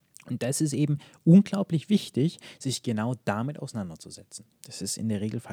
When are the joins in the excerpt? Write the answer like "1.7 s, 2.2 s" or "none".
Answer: 4.5 s